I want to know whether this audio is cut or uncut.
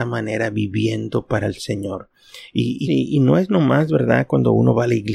cut